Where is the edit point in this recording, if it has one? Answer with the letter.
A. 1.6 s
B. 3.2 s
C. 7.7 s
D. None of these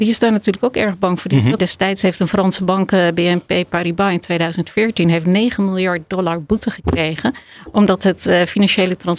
A